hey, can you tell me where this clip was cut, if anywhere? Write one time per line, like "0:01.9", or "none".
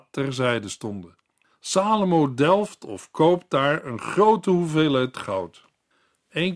0:01.5